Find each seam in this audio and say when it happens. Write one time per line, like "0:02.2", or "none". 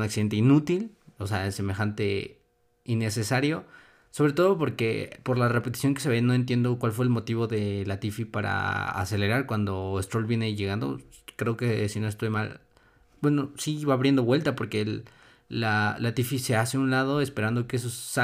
none